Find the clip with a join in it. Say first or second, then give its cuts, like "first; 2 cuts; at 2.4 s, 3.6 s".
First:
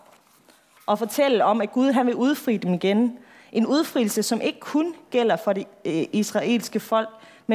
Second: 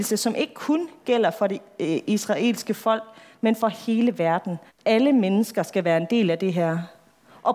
second; 1 cut; at 4.7 s